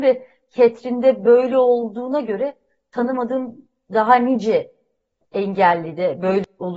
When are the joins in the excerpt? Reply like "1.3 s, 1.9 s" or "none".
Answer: none